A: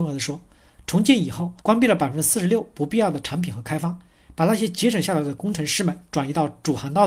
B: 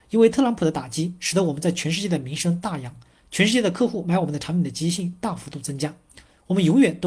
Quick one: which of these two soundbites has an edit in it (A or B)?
A